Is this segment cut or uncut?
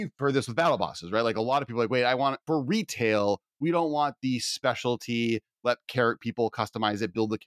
cut